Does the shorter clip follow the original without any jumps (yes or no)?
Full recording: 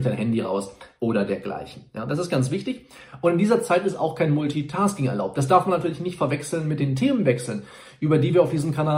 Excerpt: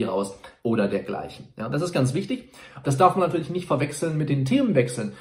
no